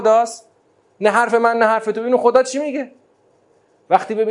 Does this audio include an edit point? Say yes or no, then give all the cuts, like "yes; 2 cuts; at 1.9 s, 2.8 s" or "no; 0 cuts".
no; 0 cuts